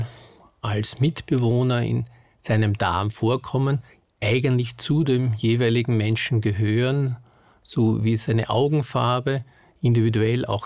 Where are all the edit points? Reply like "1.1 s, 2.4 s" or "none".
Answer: none